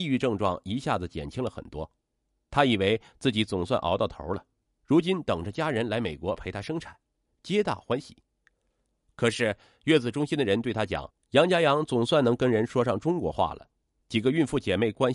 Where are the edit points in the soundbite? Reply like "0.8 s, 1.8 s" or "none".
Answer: 7.3 s, 11.2 s